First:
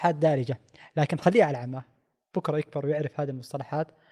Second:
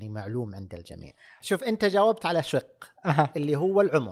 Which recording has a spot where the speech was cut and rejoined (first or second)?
second